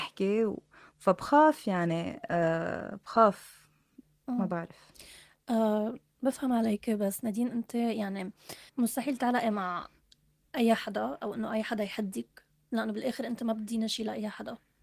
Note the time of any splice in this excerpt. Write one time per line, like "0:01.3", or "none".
0:08.7